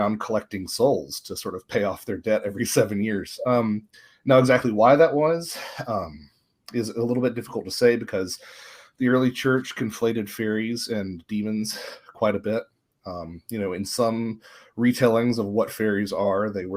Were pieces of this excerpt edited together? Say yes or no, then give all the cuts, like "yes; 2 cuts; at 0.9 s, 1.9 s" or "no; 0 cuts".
no; 0 cuts